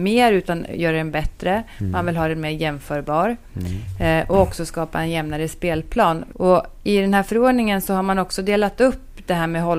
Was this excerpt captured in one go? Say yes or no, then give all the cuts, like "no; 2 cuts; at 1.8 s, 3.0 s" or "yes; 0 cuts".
no; 1 cut; at 6.3 s